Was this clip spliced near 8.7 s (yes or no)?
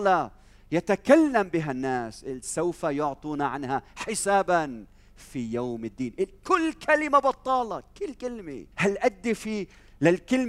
yes